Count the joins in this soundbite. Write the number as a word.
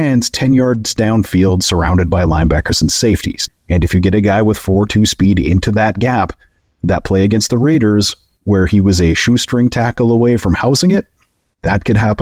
one